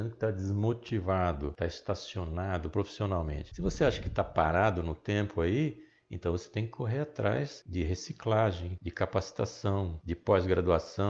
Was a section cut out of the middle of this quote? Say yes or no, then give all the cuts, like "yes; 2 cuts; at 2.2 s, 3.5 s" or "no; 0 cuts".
no; 0 cuts